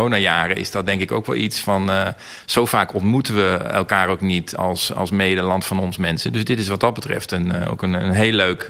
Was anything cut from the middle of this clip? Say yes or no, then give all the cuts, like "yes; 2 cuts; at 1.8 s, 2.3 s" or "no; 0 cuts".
no; 0 cuts